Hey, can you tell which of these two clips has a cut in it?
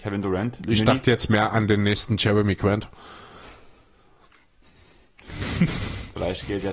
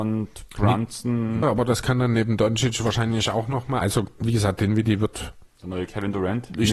second; 3 cuts; at 1.4 s, 3.8 s, 5.5 s

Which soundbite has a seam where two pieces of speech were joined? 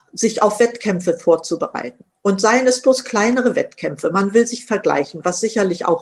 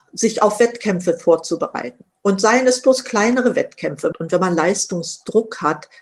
second; 1 cut; at 4.1 s

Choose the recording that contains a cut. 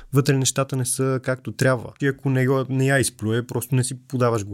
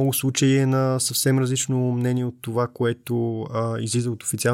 first; 1 cut; at 2.0 s

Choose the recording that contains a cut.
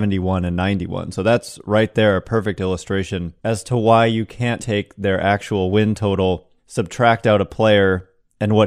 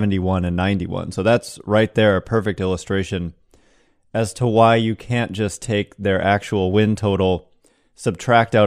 first; 3 cuts; at 3.4 s, 4.6 s, 6.6 s

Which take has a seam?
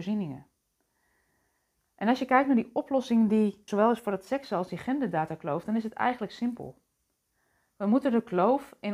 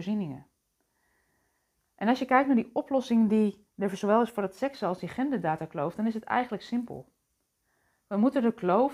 first; 1 cut; at 3.7 s

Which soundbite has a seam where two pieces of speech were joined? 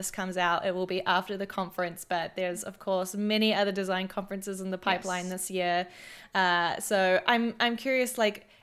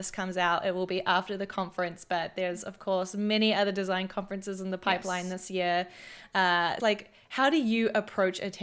second; 1 cut; at 6.8 s

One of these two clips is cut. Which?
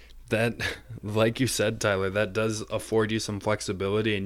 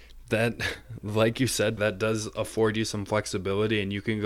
second; 1 cut; at 1.8 s

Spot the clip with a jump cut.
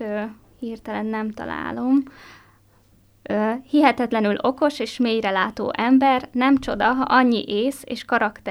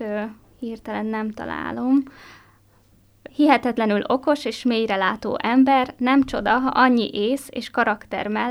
second; 1 cut; at 3.3 s

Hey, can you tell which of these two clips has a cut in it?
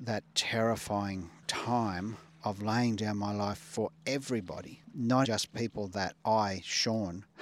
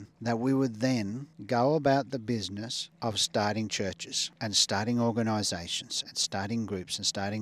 first; 1 cut; at 5.2 s

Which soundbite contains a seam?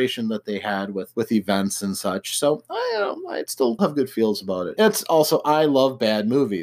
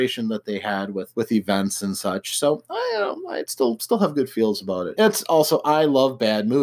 first; 1 cut; at 3.8 s

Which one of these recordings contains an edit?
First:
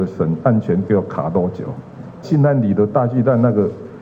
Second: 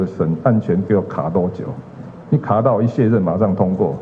first; 1 cut; at 2.2 s

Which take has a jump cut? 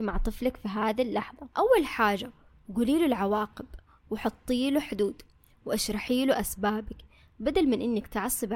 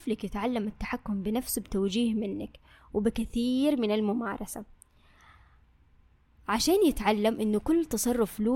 first; 1 cut; at 1.5 s

